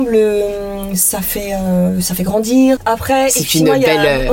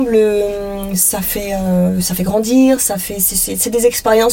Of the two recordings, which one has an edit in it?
first; 1 cut; at 2.8 s

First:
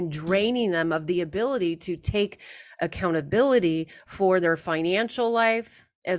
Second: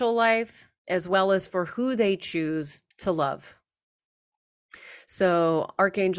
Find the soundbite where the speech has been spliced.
second; 1 cut; at 2.9 s

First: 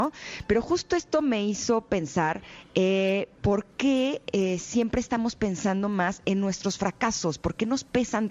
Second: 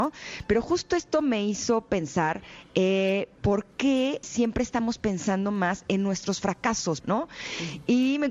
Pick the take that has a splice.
second; 2 cuts; at 4.2 s, 7.0 s

